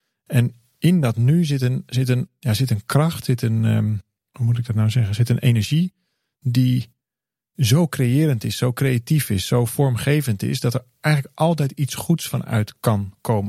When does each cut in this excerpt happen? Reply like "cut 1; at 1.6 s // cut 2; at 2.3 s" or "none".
none